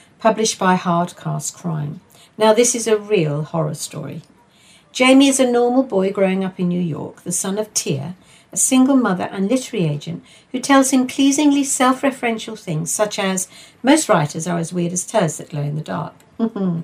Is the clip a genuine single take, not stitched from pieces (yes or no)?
yes